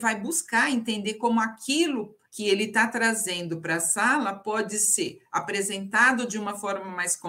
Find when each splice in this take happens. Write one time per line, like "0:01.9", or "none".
0:02.3